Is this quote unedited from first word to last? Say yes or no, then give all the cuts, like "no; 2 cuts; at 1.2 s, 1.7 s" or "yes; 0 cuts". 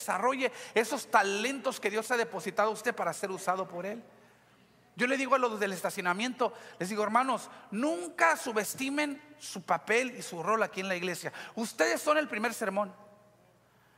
yes; 0 cuts